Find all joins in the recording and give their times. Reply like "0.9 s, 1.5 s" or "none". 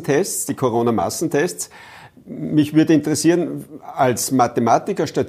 none